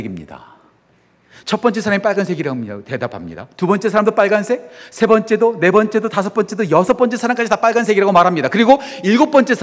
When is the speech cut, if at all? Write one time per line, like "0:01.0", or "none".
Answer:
none